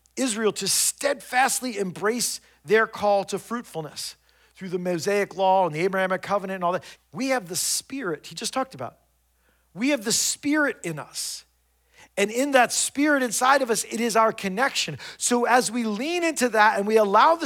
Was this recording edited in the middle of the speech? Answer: yes; 1 cut; at 7.0 s

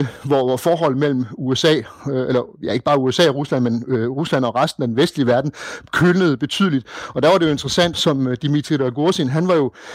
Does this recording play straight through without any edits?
no; 1 cut; at 7.9 s

